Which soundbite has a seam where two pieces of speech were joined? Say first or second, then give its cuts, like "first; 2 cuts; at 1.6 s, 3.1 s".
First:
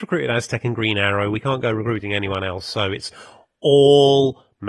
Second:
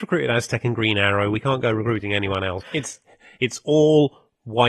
second; 1 cut; at 2.6 s